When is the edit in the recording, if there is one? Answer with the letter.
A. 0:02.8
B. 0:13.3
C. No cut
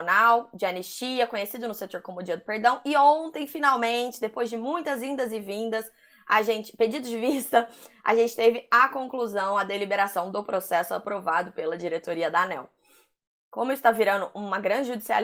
B